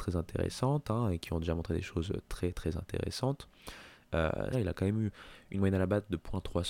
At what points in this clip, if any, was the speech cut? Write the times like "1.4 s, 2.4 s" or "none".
4.5 s